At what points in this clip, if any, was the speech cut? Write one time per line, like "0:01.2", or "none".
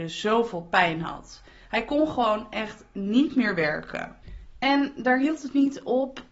none